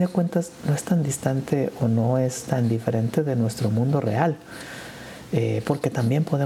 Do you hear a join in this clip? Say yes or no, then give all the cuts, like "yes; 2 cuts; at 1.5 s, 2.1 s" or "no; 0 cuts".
no; 0 cuts